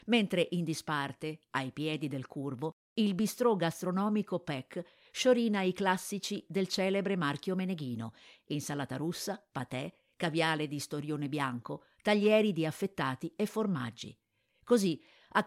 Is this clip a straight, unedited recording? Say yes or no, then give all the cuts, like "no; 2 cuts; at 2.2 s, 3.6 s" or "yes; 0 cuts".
no; 1 cut; at 14.5 s